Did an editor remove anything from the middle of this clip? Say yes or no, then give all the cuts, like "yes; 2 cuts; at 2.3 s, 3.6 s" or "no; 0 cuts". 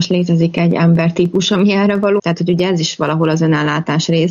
yes; 1 cut; at 2.2 s